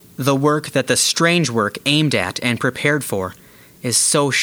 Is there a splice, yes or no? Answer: no